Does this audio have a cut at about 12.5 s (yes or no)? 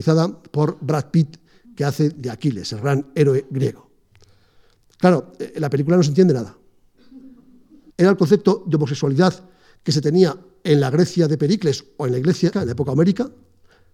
yes